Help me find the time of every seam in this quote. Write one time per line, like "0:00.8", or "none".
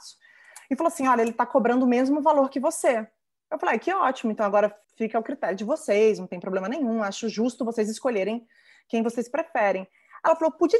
0:04.8